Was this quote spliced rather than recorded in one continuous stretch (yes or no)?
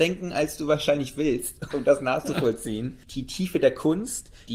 yes